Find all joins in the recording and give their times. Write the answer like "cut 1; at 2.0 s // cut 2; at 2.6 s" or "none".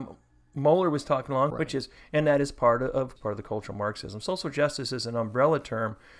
cut 1; at 1.5 s // cut 2; at 3.2 s

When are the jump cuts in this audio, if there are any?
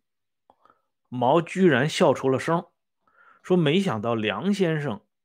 cut 1; at 1.0 s

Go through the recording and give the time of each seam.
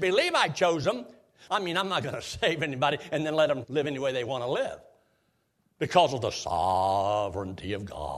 cut 1; at 1.5 s // cut 2; at 3.6 s

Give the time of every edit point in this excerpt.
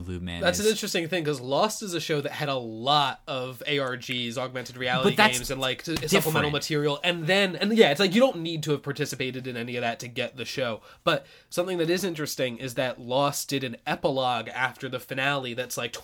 none

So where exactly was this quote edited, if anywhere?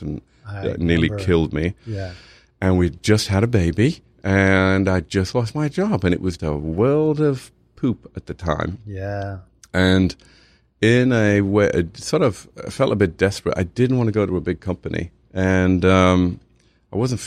cut 1; at 6.4 s

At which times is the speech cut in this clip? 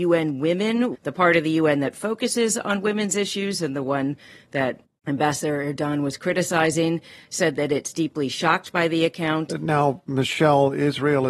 cut 1; at 0.9 s // cut 2; at 9.5 s

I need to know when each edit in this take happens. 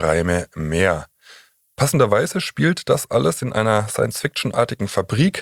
none

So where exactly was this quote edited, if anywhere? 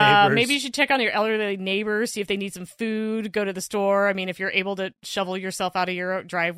none

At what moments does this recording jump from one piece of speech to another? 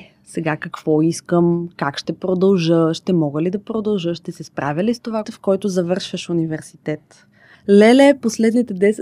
cut 1; at 5.2 s // cut 2; at 7.5 s

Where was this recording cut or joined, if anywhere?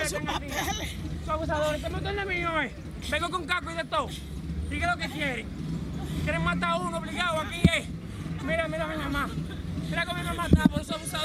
cut 1; at 8.4 s

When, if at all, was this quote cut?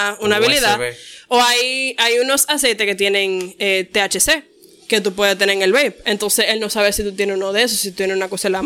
none

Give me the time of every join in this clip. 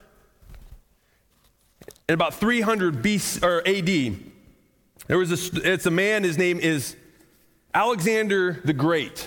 none

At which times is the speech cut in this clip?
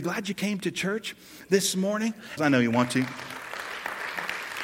cut 1; at 2.4 s

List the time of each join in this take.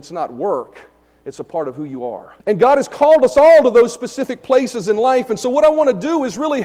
cut 1; at 2.4 s

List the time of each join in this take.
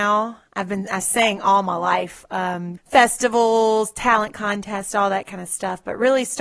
cut 1; at 2.8 s

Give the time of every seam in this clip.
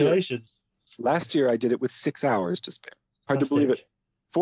cut 1; at 3.3 s

